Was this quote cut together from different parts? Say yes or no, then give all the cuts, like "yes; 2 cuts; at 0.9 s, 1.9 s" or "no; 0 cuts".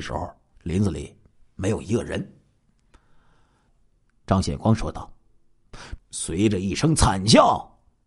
yes; 2 cuts; at 3.7 s, 6.0 s